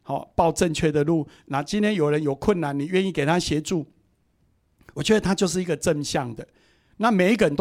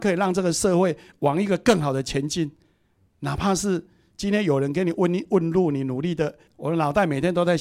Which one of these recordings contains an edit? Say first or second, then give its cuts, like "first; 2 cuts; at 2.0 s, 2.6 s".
second; 2 cuts; at 3.1 s, 6.5 s